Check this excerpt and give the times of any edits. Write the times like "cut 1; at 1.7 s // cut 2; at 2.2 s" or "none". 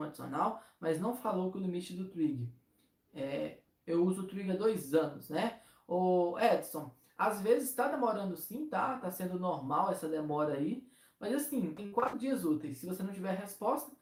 cut 1; at 11.8 s